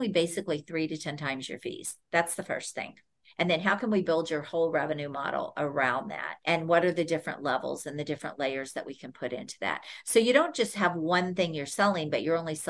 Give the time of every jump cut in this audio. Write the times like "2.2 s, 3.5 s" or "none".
6.4 s